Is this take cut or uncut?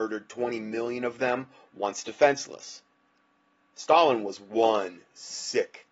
uncut